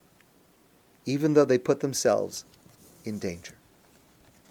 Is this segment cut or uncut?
uncut